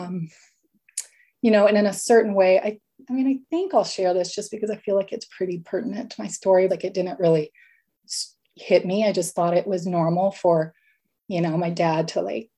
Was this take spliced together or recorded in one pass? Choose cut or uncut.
cut